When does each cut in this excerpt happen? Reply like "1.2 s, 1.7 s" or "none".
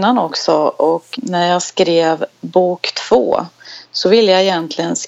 1.1 s